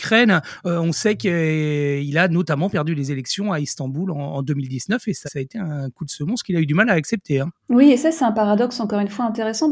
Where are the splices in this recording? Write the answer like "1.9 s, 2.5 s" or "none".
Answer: 5.3 s